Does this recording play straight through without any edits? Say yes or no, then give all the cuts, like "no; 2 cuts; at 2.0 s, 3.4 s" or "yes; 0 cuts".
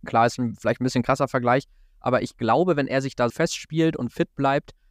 no; 1 cut; at 3.3 s